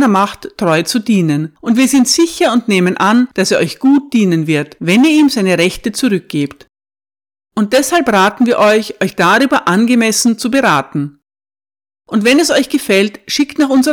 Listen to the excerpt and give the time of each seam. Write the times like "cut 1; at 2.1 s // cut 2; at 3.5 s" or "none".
none